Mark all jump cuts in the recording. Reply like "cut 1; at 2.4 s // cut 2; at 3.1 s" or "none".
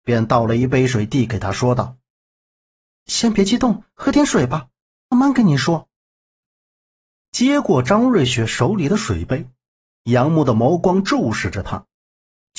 cut 1; at 5.1 s